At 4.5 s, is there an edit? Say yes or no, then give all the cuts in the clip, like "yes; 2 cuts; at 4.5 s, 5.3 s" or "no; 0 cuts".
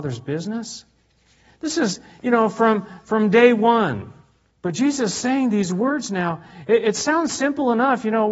yes; 1 cut; at 4.5 s